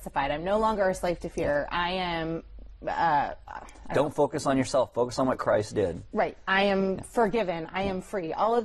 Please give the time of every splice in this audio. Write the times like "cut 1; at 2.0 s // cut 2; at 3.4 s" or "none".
none